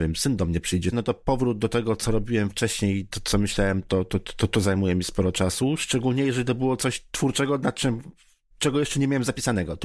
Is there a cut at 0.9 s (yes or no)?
yes